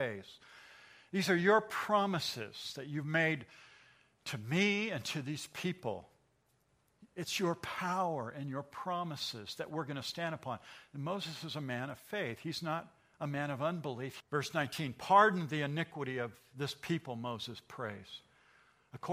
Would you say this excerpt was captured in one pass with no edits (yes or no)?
no